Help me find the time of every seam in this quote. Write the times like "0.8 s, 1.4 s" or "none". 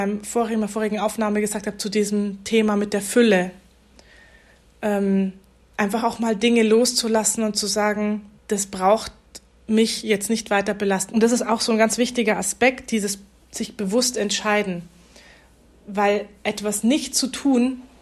8.4 s, 11.1 s

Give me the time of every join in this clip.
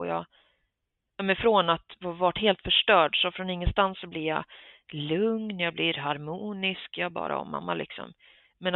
none

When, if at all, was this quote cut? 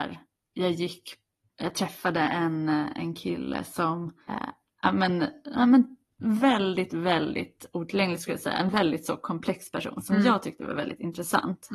4.3 s

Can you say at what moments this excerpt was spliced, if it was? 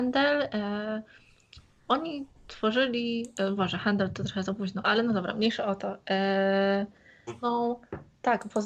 7.3 s

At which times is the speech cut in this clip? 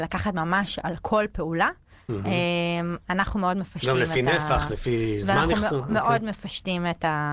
none

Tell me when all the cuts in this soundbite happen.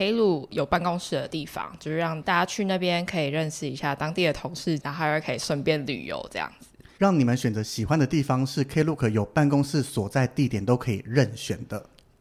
4.8 s, 7.0 s

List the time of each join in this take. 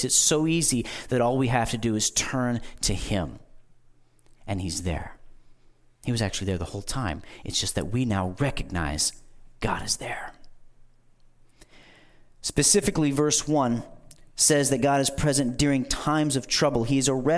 none

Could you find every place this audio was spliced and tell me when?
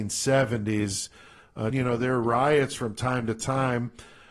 1.7 s

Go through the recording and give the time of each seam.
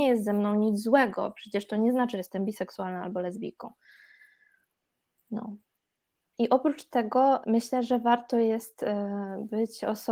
6.3 s, 7.4 s

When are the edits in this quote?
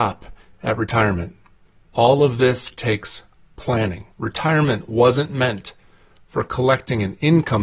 1.9 s, 4.1 s

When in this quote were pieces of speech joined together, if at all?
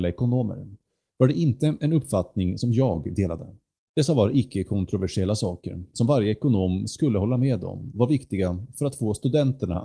3.8 s

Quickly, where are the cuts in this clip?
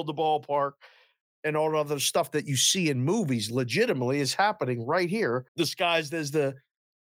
5.5 s

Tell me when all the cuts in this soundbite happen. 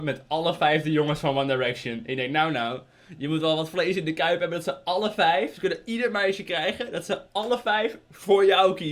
none

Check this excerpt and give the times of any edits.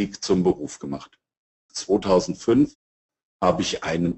1.7 s

